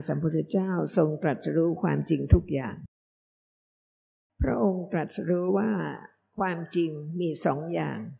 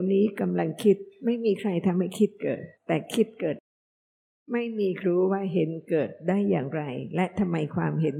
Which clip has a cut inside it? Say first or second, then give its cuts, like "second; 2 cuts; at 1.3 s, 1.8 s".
second; 2 cuts; at 2.8 s, 5.0 s